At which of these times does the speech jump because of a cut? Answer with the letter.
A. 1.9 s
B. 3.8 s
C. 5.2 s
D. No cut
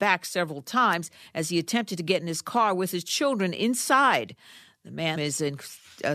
C